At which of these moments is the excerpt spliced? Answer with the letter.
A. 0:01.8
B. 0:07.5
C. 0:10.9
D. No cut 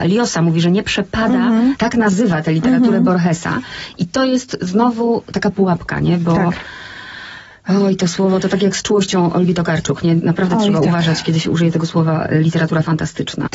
A